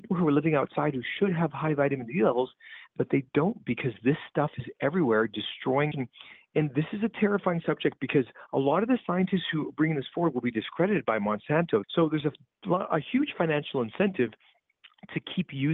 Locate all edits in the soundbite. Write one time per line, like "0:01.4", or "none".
0:05.9
0:11.8